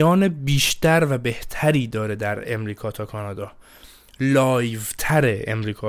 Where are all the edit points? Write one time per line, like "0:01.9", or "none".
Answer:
none